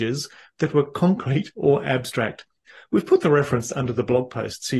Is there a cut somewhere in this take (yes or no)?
no